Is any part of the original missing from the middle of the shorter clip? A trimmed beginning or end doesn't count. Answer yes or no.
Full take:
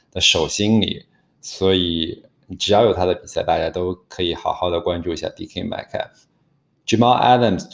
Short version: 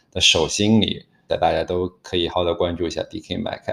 yes